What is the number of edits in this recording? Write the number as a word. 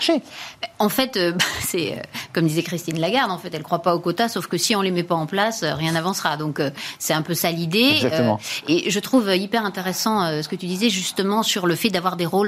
zero